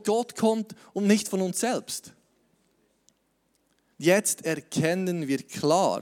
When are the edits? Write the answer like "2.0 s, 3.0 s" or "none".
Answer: 3.9 s